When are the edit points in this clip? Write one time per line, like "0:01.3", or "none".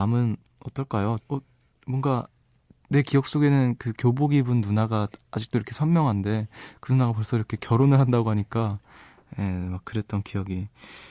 0:01.2